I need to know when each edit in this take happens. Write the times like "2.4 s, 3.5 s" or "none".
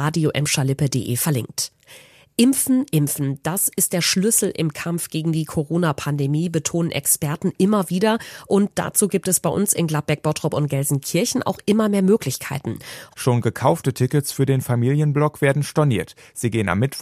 2.9 s, 13.1 s